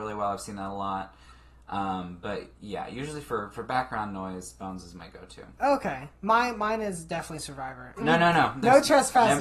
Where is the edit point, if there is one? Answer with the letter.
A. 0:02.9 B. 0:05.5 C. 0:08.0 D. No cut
C